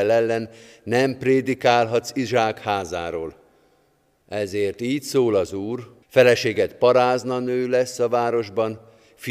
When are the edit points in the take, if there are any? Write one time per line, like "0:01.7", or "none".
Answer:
0:06.0